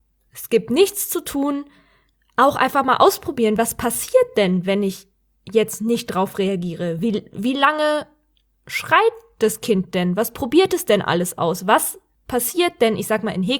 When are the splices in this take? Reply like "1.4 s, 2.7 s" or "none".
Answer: none